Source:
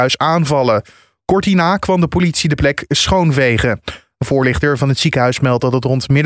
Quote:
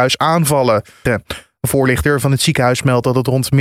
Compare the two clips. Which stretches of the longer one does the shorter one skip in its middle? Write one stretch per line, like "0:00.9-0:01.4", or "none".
0:01.1-0:03.6